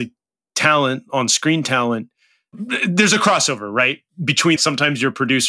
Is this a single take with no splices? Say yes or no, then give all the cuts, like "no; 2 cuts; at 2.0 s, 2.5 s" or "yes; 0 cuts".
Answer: no; 1 cut; at 4.6 s